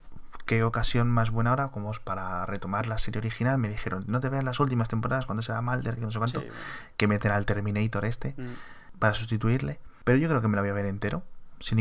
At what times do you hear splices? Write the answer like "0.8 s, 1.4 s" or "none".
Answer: 6.0 s

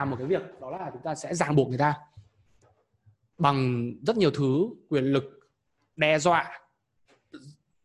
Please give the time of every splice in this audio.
none

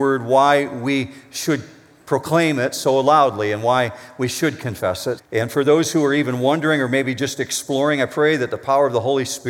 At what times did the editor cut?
5.2 s

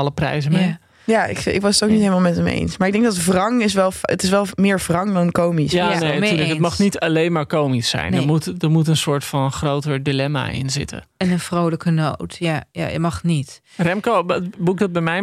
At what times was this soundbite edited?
none

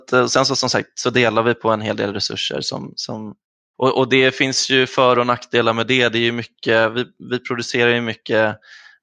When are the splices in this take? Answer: none

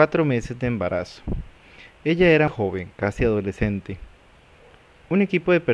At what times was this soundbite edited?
2.5 s

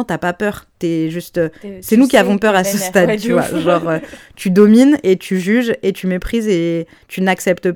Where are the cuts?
none

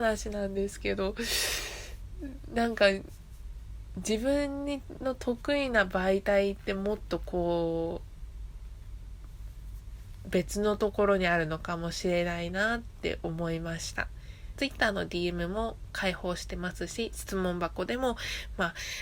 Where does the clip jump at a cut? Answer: 14.6 s

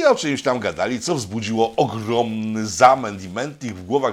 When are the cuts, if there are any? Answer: none

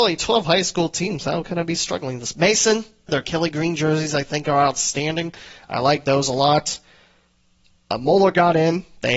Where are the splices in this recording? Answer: 3.1 s

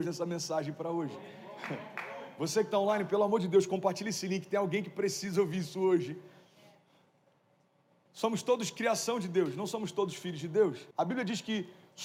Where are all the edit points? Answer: 10.9 s

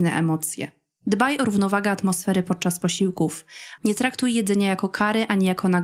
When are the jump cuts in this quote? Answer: 3.8 s

